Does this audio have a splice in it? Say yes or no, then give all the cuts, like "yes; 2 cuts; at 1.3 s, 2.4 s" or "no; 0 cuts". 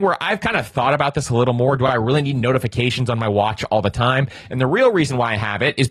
no; 0 cuts